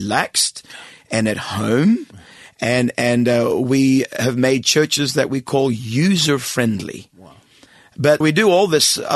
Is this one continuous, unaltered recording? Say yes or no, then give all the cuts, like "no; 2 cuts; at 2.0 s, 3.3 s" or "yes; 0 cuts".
no; 2 cuts; at 7.1 s, 8.2 s